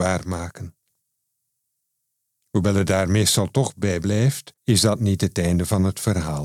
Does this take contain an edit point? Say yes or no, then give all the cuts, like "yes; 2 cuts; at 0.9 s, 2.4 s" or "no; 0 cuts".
yes; 1 cut; at 4.6 s